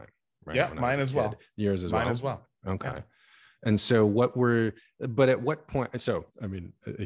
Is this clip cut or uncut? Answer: uncut